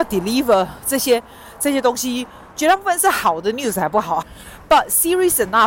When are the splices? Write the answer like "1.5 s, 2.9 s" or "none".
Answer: 4.2 s